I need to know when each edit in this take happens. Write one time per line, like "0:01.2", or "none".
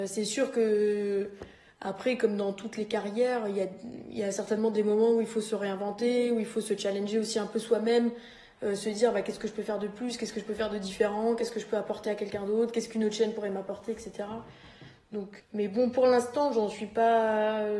0:15.4

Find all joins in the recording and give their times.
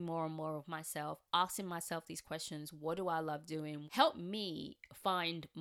0:03.9

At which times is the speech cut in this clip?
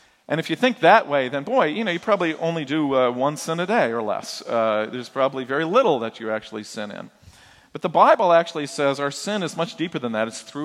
none

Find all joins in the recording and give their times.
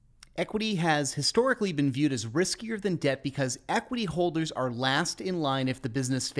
none

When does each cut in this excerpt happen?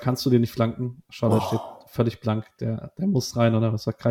none

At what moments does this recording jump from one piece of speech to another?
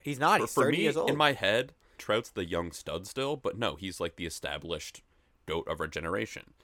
0:02.0

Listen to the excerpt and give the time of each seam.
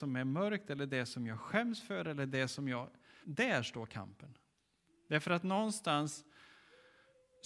0:03.2
0:04.9

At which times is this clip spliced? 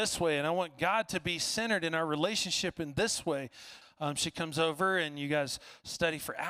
0:03.8

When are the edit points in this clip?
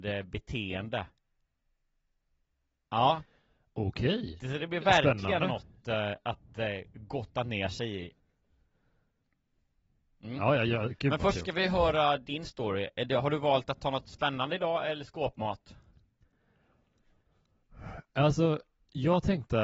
none

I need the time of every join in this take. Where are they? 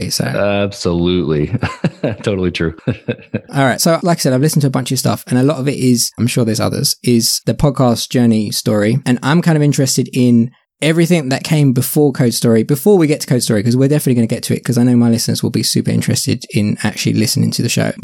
0:06.2

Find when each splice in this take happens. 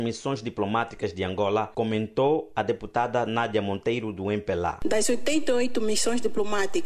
none

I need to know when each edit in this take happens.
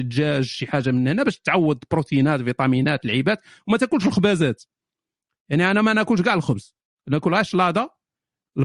none

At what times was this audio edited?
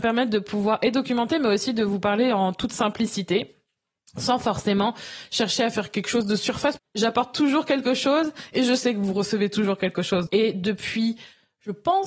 0:06.8
0:10.3

